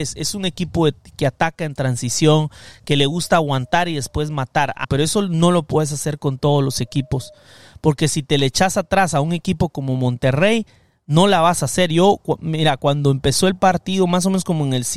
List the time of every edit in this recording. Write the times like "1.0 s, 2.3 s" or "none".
4.8 s